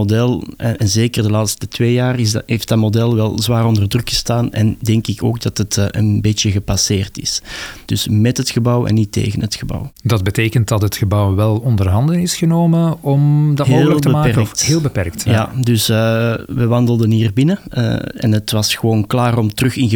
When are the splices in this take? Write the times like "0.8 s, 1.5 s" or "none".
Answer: 7.9 s